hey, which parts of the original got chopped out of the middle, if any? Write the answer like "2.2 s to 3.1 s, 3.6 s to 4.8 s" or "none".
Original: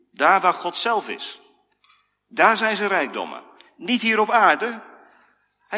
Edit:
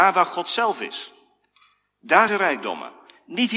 2.6 s to 2.8 s